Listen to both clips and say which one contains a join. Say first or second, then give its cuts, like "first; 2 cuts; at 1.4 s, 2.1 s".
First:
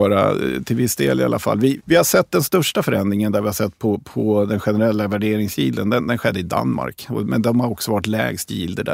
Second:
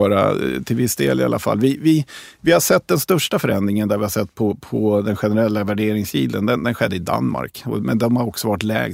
first; 1 cut; at 1.8 s